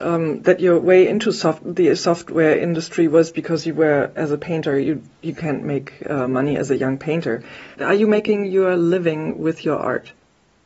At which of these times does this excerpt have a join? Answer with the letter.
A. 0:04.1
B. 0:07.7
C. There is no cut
B